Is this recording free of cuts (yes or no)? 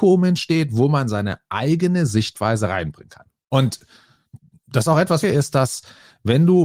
no